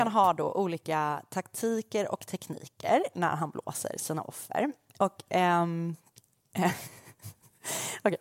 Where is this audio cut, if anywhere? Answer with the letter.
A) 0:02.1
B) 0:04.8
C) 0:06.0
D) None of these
D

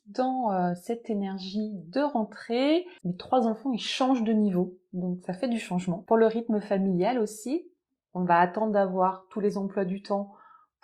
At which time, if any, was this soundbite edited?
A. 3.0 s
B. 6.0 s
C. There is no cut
A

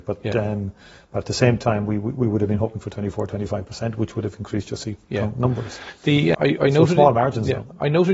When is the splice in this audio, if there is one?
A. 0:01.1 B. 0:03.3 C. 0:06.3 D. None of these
C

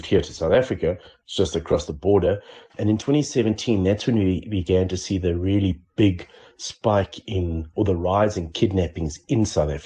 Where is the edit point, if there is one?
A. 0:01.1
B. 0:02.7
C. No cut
B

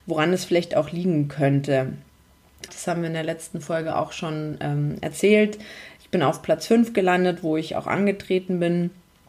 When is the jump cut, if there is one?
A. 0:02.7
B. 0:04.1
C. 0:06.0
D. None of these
A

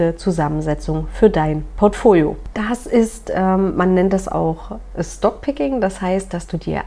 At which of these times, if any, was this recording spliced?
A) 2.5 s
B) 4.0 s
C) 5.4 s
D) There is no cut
D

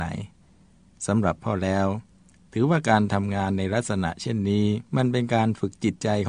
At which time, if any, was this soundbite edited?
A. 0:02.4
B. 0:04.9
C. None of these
B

